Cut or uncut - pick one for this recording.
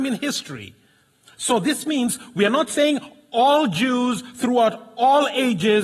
uncut